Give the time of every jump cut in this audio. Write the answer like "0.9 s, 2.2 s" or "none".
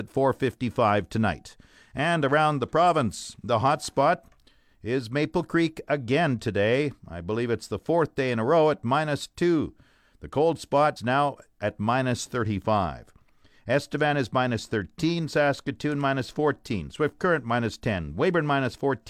11.0 s